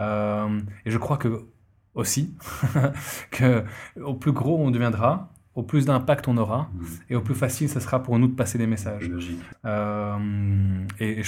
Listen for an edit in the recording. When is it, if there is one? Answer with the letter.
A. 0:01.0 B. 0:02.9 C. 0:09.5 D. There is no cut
C